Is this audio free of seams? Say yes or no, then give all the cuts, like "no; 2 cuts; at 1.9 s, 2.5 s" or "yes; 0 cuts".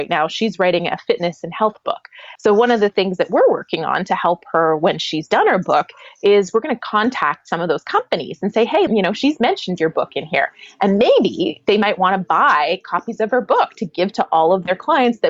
no; 2 cuts; at 2.4 s, 8.9 s